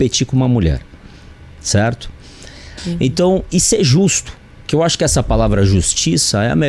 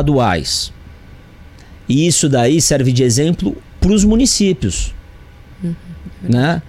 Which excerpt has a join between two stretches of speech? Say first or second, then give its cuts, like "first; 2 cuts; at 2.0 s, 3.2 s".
first; 1 cut; at 2.8 s